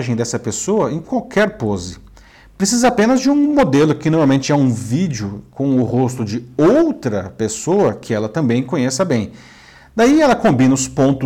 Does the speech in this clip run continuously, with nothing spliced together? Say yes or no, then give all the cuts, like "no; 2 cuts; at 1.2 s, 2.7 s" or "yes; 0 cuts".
yes; 0 cuts